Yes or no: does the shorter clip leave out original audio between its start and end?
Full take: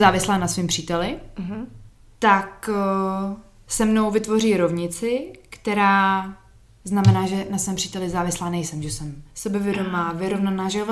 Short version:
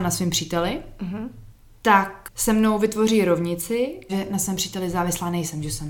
yes